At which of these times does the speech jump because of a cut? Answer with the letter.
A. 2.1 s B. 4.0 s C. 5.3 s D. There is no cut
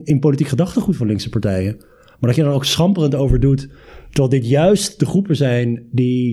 D